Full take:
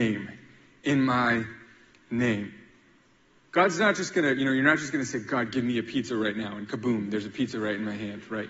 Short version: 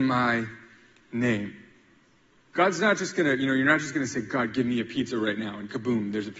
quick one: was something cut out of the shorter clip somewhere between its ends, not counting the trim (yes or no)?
no